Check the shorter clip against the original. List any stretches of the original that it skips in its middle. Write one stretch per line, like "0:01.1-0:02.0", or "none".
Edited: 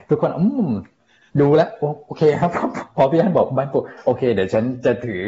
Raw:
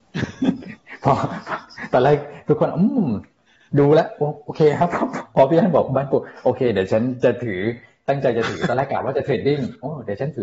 none